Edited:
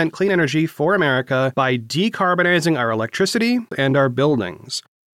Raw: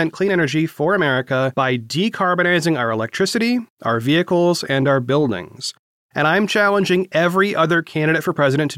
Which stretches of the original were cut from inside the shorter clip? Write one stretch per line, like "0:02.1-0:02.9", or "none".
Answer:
0:03.7-0:04.6